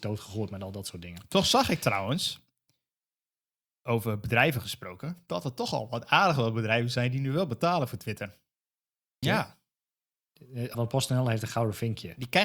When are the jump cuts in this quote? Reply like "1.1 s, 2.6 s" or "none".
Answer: 9.2 s, 10.7 s